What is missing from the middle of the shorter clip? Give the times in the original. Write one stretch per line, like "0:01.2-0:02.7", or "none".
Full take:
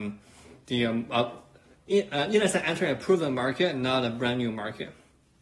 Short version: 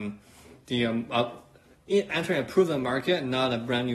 0:02.1-0:02.6